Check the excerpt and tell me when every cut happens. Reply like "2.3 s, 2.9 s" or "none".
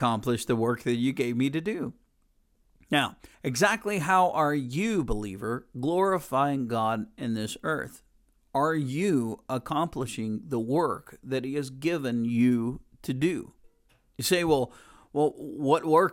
3.3 s